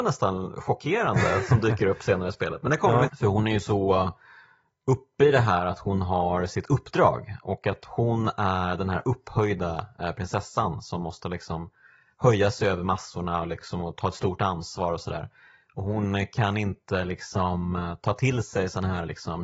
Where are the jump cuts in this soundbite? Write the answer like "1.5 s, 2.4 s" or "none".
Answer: 3.1 s